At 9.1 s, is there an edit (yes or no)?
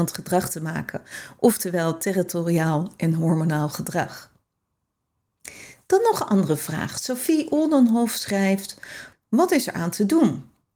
yes